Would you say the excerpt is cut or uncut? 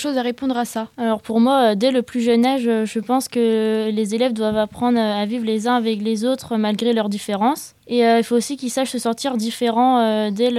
cut